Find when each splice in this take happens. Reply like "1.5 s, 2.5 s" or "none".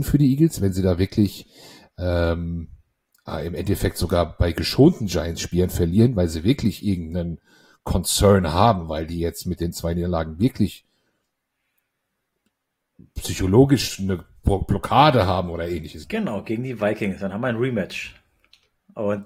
16.0 s